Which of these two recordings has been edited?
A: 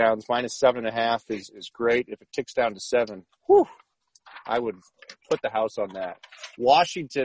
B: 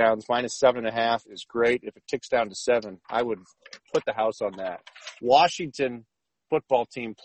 B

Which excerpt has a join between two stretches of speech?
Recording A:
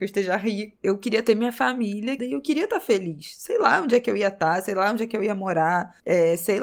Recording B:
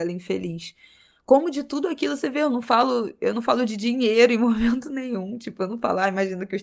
A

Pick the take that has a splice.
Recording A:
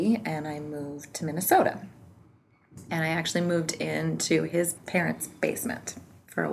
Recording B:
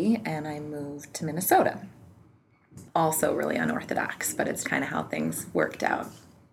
B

